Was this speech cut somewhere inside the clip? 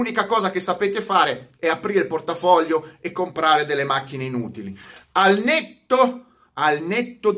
no; 0 cuts

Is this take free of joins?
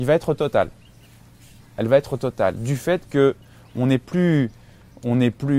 yes; 0 cuts

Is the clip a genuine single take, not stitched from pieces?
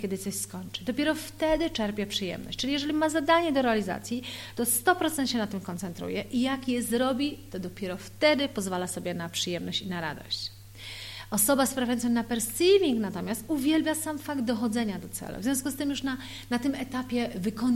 yes; 0 cuts

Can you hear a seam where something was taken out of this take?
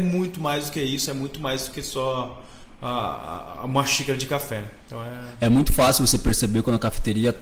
no; 0 cuts

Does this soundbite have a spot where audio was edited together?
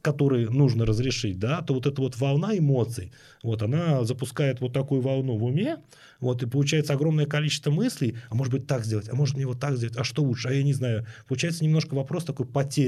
no; 0 cuts

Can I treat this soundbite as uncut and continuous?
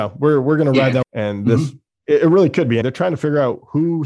no; 2 cuts; at 1.0 s, 2.8 s

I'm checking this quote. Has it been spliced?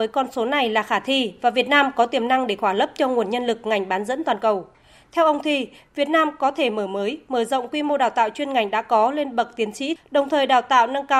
yes; 1 cut; at 10.0 s

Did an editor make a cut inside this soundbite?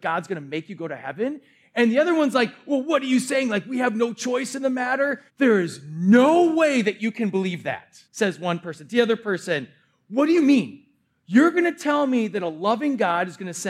yes; 2 cuts; at 5.3 s, 8.0 s

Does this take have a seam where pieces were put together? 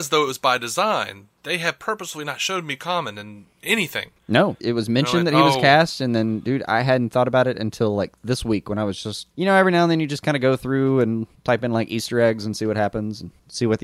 yes; 2 cuts; at 4.6 s, 9.3 s

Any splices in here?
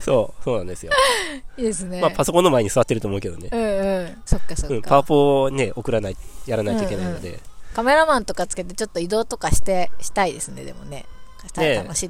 yes; 1 cut; at 4.3 s

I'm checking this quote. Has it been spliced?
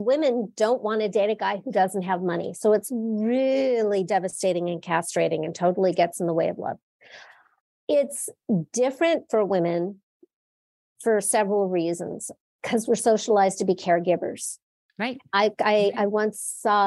no; 0 cuts

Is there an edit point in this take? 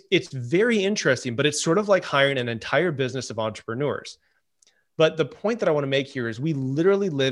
no; 0 cuts

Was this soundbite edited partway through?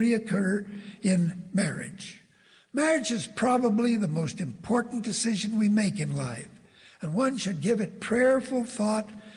no; 0 cuts

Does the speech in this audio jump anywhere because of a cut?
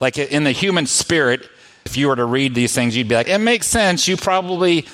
yes; 2 cuts; at 1.9 s, 3.2 s

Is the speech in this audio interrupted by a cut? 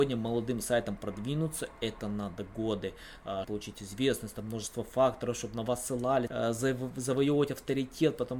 yes; 2 cuts; at 3.4 s, 6.3 s

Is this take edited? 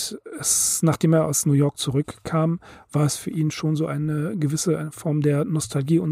no; 0 cuts

